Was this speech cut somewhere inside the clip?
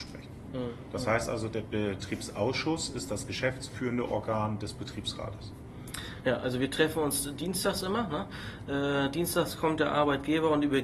no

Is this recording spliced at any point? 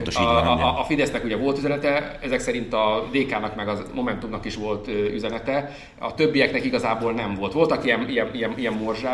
no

